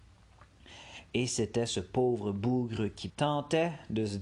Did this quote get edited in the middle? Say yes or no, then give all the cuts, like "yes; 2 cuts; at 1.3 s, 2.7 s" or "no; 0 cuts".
yes; 1 cut; at 3.1 s